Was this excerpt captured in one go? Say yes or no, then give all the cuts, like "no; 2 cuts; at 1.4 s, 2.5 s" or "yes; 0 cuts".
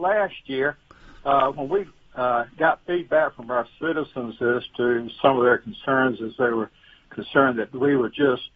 yes; 0 cuts